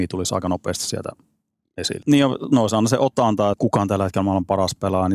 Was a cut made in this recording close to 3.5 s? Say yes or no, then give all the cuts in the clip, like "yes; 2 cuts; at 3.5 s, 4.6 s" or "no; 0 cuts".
yes; 2 cuts; at 2.0 s, 3.5 s